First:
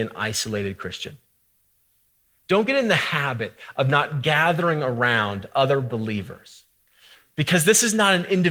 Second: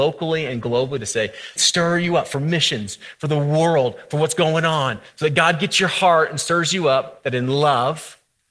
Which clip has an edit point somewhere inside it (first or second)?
second